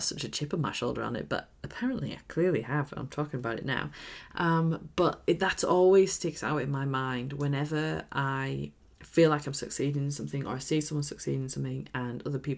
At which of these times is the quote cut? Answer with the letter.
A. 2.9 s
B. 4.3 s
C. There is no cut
B